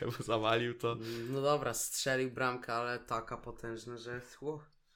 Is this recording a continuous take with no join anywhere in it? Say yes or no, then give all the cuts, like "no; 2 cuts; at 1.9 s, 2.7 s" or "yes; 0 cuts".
yes; 0 cuts